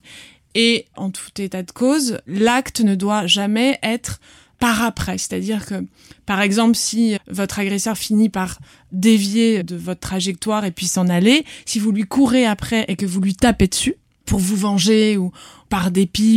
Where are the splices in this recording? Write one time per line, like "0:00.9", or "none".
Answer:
0:07.2
0:09.6

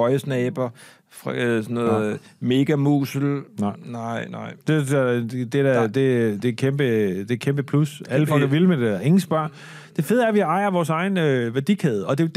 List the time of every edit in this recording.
none

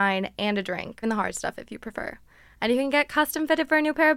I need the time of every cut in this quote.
0:01.0

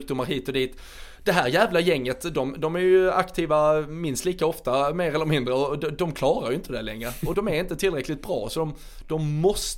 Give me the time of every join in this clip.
0:07.3

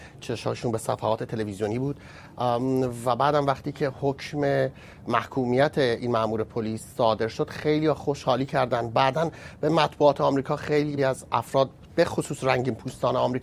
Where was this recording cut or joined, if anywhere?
0:11.0

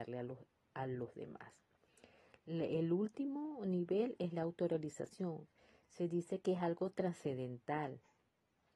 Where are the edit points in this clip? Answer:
none

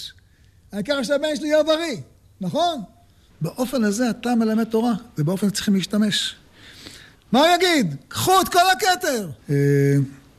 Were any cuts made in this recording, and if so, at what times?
0:03.3
0:07.1
0:09.4

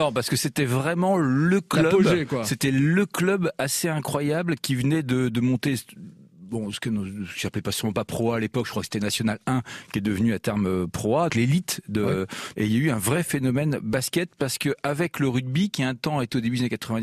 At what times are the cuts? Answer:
0:11.3
0:12.5

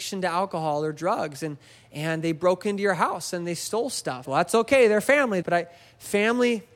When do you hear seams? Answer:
0:04.2
0:05.4

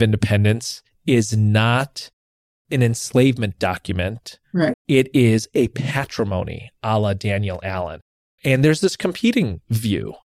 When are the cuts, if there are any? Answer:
0:04.7
0:08.2

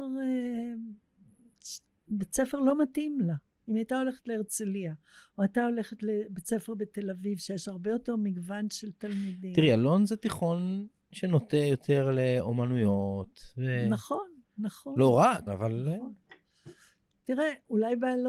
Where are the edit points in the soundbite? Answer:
0:15.5

